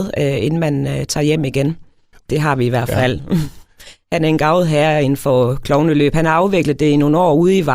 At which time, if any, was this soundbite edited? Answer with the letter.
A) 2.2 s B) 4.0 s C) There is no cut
A